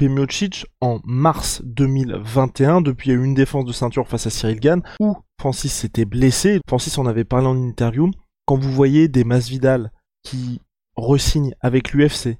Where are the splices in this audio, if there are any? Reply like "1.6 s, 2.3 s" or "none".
6.6 s